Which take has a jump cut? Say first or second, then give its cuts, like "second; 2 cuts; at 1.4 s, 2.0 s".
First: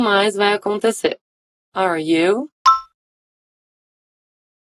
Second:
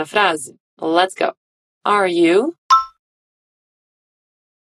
first; 1 cut; at 1.5 s